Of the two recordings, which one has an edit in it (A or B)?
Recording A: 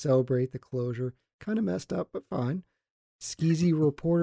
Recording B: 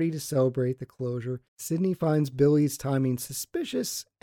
B